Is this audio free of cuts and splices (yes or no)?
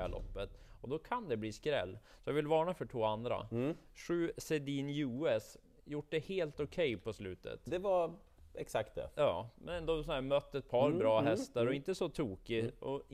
yes